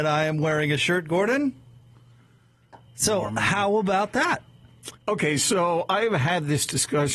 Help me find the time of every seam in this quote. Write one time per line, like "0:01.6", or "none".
0:02.9
0:05.0